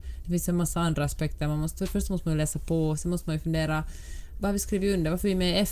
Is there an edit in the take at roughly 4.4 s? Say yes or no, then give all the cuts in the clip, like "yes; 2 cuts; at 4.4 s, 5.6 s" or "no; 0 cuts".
yes; 1 cut; at 4.4 s